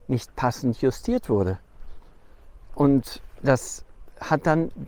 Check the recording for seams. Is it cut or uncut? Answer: uncut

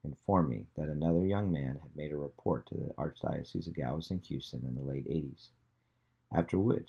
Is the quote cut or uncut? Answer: uncut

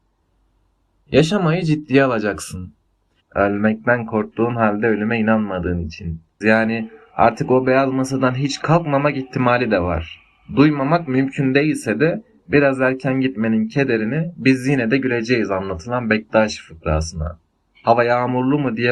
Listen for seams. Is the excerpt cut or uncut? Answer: cut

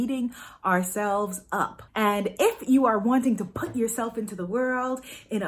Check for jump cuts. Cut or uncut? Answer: cut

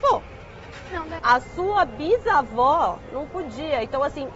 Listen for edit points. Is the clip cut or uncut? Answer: cut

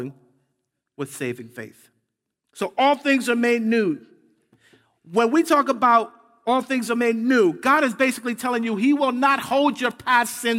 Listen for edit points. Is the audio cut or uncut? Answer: cut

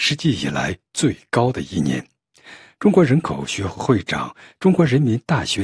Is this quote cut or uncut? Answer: uncut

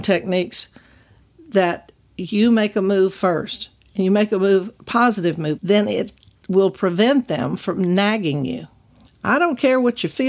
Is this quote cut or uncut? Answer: cut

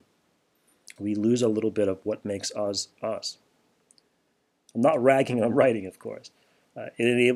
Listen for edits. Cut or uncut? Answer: cut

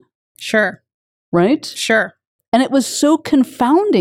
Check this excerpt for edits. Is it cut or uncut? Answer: uncut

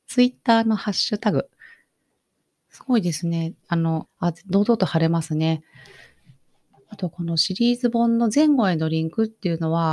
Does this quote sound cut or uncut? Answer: cut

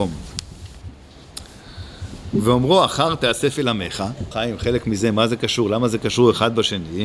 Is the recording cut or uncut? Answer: cut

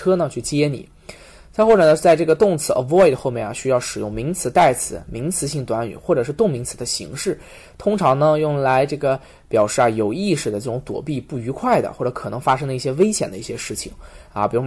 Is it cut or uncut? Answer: uncut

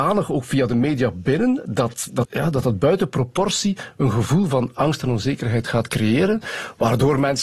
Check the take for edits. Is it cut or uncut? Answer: cut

